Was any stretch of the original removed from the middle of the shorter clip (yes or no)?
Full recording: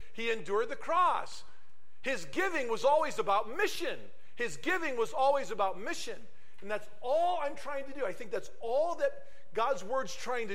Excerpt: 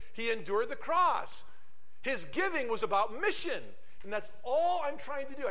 yes